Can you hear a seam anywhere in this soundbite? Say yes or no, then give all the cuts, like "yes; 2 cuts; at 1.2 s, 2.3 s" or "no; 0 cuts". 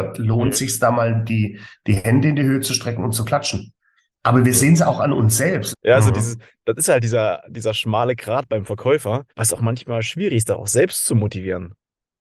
yes; 2 cuts; at 5.7 s, 9.3 s